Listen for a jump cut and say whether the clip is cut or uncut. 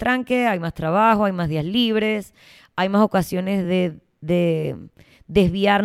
uncut